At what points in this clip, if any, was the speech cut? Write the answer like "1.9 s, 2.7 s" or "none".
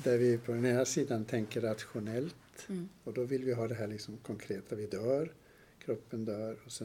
none